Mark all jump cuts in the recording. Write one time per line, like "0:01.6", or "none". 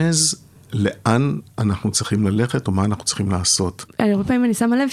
0:01.5
0:03.8